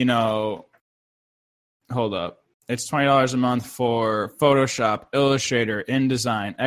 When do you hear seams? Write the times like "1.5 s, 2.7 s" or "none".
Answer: none